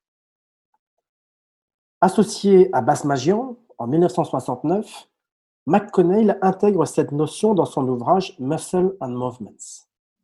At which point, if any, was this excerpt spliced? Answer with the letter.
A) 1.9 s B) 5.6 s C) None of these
C